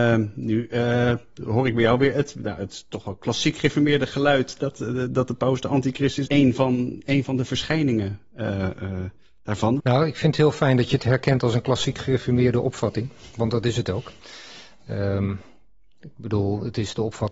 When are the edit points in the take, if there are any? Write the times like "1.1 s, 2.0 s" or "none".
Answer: 6.3 s, 9.8 s